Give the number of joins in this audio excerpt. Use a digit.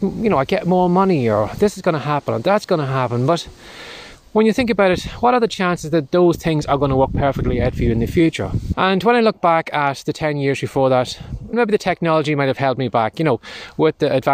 2